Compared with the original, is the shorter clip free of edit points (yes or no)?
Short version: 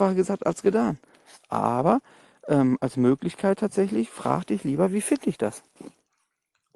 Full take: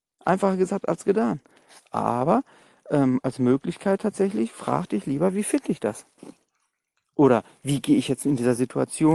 yes